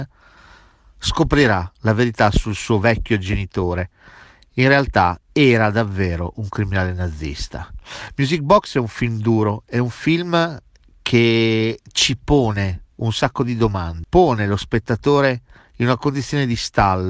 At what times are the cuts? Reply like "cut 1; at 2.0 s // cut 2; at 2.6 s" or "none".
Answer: cut 1; at 14.0 s